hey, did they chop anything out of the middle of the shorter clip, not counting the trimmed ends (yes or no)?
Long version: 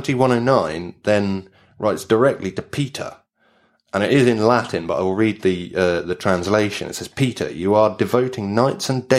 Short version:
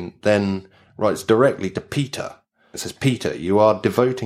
yes